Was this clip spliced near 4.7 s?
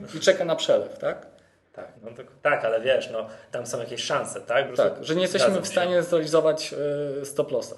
yes; 2 cuts; at 1.9 s, 4.7 s

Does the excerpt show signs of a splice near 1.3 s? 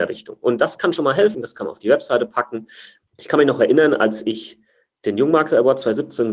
yes; 1 cut; at 1.3 s

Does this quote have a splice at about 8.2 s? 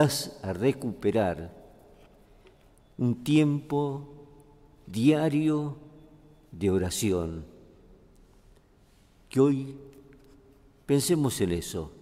no; 0 cuts

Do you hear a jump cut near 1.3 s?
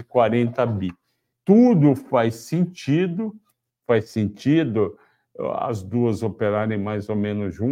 yes; 1 cut; at 1.3 s

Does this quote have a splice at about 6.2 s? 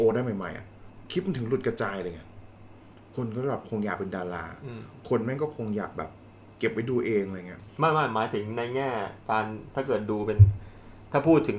no; 1 cut; at 7.7 s

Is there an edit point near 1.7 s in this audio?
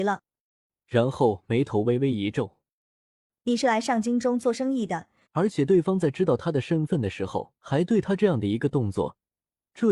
no; 2 cuts; at 5.2 s, 7.6 s

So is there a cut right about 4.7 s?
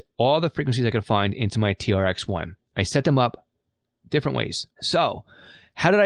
yes; 1 cut; at 4.7 s

